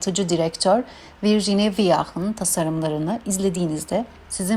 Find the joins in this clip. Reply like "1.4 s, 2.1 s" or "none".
none